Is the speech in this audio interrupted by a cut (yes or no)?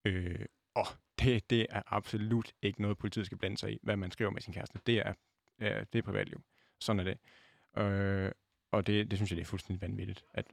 no